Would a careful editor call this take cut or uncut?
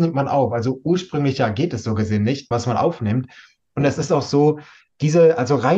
cut